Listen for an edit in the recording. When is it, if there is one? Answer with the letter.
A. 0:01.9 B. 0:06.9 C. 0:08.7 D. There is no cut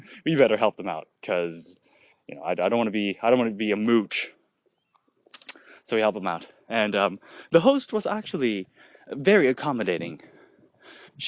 D